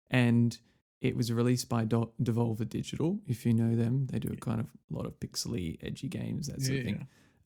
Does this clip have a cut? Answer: no; 0 cuts

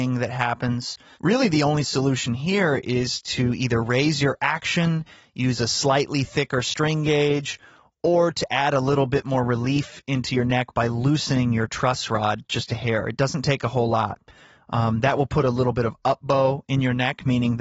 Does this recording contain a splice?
no; 0 cuts

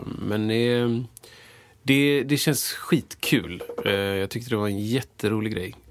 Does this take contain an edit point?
no; 0 cuts

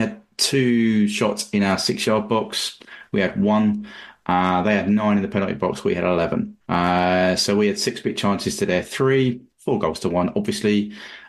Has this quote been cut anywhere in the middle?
yes; 1 cut; at 6.6 s

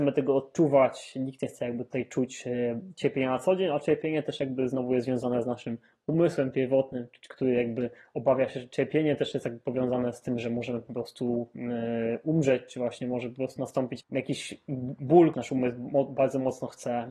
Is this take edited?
yes; 2 cuts; at 14.0 s, 15.3 s

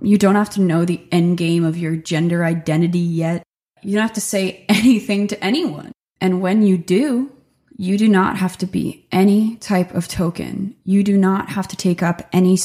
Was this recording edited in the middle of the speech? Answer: yes; 1 cut; at 7.7 s

